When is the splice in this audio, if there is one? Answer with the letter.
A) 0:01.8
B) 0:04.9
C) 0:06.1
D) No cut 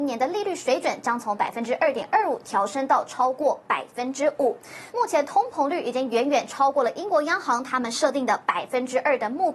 B